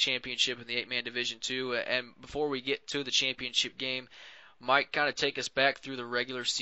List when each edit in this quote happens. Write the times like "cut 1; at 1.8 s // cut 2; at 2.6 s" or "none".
none